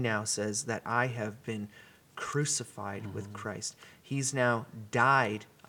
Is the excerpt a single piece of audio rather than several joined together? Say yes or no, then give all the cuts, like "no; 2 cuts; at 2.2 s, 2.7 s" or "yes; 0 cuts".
yes; 0 cuts